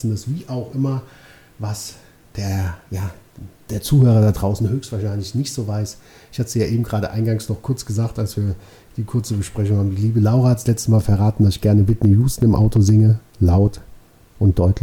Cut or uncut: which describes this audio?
uncut